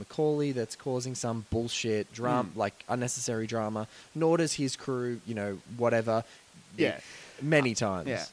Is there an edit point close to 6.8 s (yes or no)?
yes